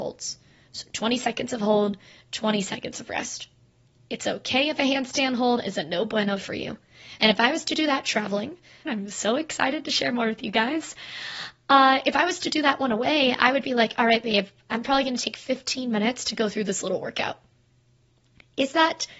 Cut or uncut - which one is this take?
cut